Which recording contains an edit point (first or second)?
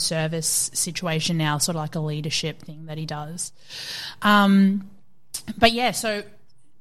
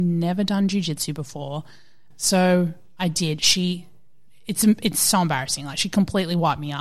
second